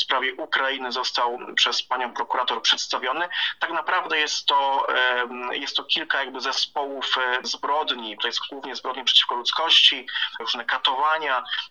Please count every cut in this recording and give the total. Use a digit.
2